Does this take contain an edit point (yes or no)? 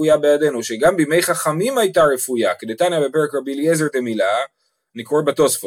no